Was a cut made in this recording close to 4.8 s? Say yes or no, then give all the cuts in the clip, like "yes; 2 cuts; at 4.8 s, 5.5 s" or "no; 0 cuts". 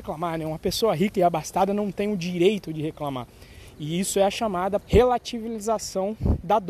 yes; 1 cut; at 4.8 s